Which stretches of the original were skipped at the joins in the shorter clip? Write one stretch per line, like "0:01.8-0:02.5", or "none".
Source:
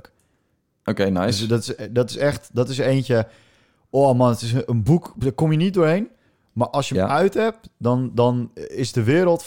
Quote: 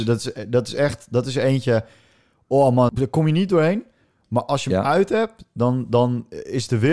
0:04.3-0:05.1

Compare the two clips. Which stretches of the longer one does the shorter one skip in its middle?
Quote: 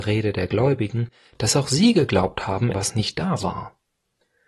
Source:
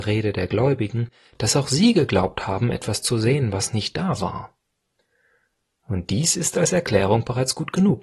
0:02.7-0:03.5

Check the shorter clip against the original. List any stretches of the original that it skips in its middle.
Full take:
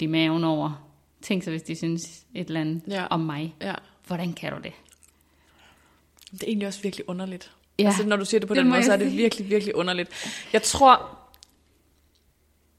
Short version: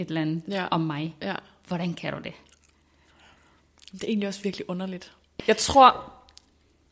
0:07.8-0:10.5

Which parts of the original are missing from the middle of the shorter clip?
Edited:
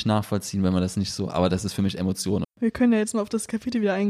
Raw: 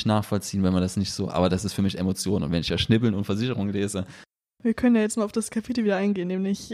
0:02.4-0:04.5

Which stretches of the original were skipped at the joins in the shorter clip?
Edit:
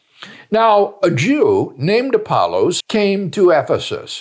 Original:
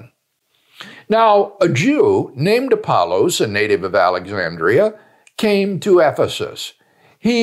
0:03.4-0:05.3

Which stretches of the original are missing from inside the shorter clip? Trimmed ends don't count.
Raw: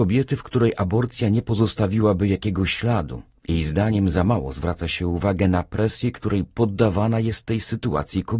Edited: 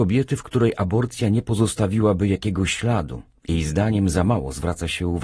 none

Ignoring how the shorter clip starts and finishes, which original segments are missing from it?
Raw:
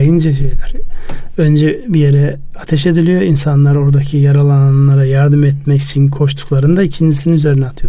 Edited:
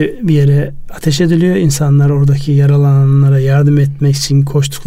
none

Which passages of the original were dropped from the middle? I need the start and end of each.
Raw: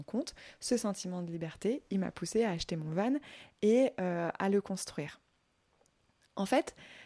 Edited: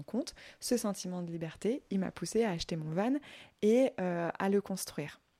none

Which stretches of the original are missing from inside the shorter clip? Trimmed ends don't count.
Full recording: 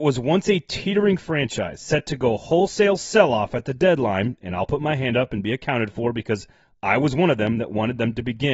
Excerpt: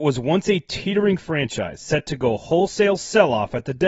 none

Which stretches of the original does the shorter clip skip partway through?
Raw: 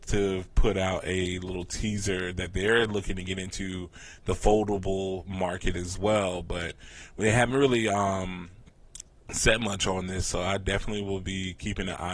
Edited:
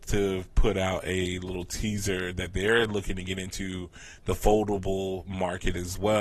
none

